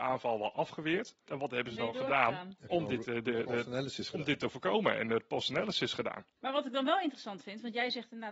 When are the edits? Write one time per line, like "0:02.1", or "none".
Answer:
0:01.3
0:06.4